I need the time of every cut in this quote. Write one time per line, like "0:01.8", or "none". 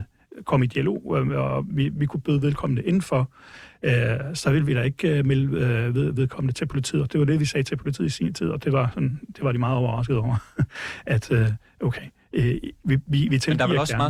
none